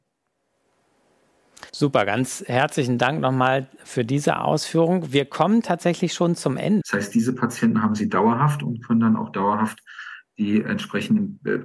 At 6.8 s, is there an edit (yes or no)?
yes